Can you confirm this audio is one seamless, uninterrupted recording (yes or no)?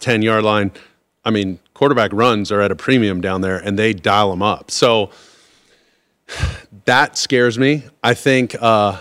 yes